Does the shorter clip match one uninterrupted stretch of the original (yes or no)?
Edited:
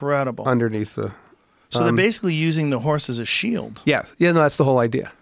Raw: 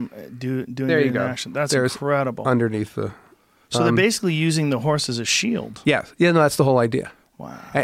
yes